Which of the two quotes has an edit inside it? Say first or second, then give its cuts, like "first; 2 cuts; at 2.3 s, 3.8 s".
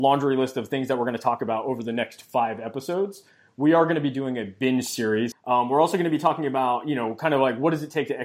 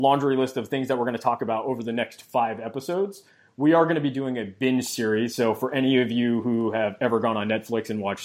first; 1 cut; at 5.3 s